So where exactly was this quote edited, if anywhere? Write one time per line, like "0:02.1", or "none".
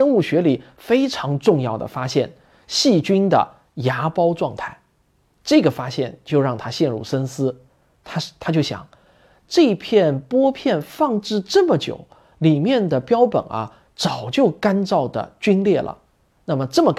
none